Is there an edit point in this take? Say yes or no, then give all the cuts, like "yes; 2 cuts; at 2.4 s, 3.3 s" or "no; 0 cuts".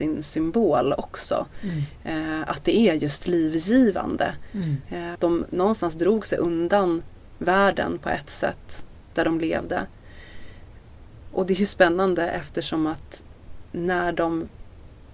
yes; 2 cuts; at 5.2 s, 11.3 s